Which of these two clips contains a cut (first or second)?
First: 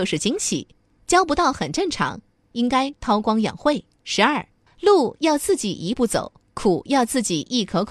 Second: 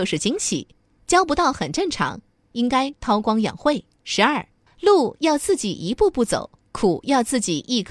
first